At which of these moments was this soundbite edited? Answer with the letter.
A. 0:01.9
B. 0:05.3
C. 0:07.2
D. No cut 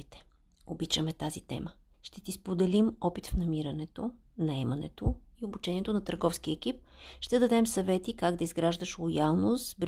A